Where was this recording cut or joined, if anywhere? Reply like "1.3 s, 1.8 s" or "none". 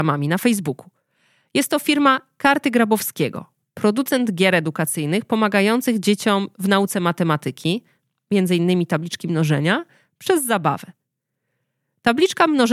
none